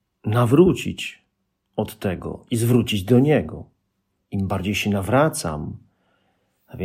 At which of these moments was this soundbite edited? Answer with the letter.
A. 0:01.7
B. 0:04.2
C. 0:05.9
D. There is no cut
B